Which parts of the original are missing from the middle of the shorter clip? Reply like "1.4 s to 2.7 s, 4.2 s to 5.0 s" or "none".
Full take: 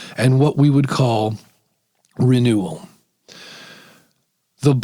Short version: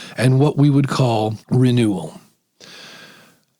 1.4 s to 2.1 s

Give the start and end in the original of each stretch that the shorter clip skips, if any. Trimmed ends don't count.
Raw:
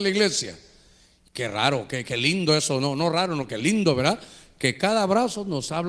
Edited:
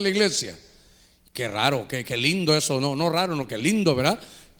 none

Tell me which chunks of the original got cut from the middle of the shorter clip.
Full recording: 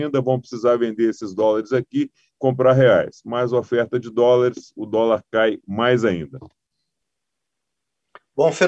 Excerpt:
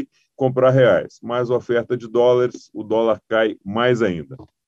none

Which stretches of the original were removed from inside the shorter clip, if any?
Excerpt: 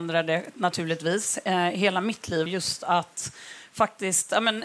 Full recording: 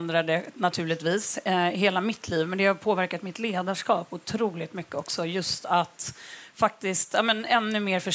2.5 s to 5.3 s

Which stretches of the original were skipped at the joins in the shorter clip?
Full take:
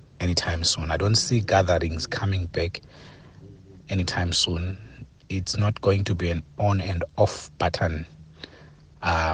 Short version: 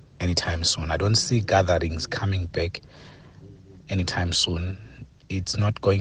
none

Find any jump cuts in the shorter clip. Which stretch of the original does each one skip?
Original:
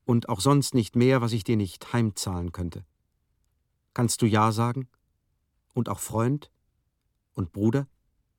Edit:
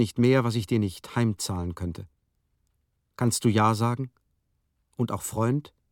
none

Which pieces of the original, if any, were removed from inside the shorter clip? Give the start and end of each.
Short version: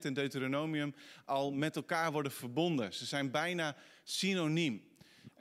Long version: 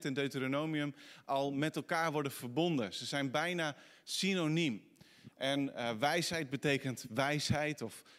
none

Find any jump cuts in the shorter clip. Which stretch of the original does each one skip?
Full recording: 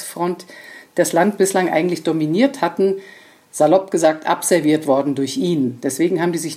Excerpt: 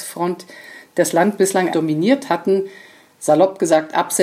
1.7 s to 2.0 s

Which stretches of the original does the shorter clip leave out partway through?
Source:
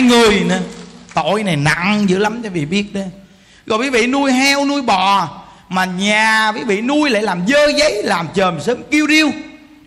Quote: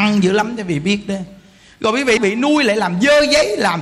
4.0 s to 6.6 s

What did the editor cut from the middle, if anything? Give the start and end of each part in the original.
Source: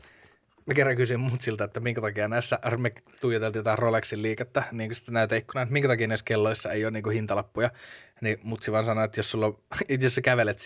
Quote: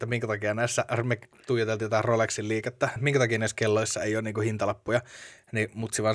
4.7 s to 5.6 s

